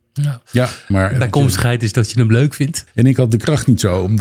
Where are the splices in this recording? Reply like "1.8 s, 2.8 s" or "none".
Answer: 0.9 s, 2.9 s